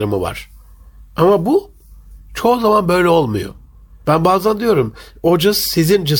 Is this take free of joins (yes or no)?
no